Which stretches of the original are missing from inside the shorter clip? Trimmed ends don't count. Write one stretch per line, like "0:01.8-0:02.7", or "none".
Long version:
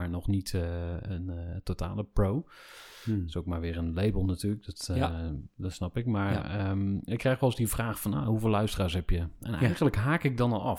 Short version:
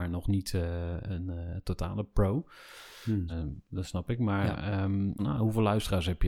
0:03.3-0:05.2
0:07.1-0:08.1